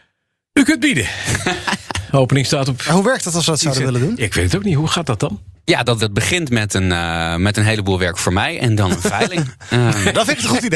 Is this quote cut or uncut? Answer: cut